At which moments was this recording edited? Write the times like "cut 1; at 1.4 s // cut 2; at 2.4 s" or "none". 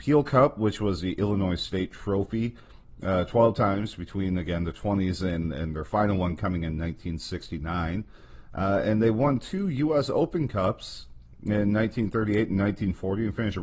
none